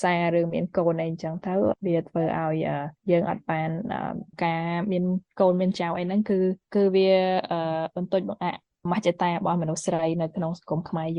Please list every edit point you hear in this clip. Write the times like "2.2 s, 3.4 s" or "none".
6.6 s